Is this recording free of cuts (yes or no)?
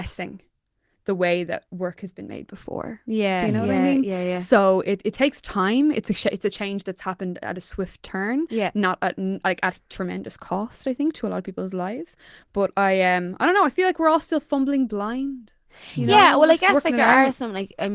yes